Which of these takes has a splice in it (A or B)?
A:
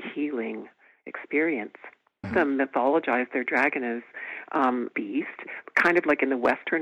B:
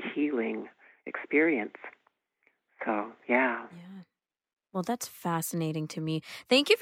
A